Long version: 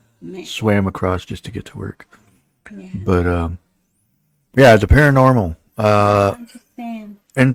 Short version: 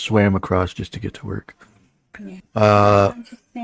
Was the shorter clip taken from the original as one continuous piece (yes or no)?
no